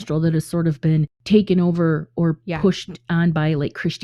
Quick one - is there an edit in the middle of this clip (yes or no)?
no